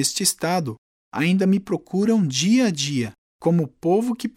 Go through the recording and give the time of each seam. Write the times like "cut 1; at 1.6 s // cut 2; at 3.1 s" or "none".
cut 1; at 3.2 s